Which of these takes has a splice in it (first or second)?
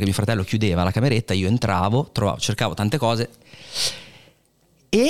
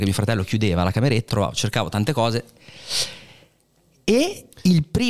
second